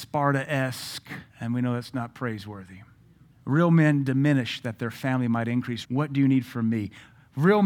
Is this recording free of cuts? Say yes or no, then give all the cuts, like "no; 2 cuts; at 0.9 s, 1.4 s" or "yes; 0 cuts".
no; 3 cuts; at 1.3 s, 3.3 s, 5.8 s